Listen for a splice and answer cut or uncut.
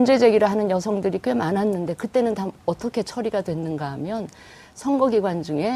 uncut